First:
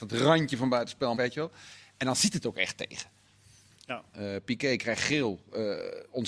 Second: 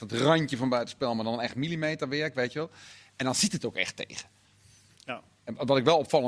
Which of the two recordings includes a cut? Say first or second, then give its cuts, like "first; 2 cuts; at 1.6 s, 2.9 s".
first; 2 cuts; at 1.1 s, 4.1 s